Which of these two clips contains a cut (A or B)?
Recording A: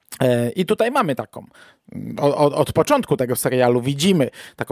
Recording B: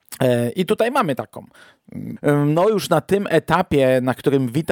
B